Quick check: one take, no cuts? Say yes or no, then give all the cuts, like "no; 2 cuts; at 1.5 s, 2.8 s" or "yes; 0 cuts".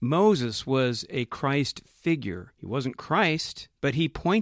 yes; 0 cuts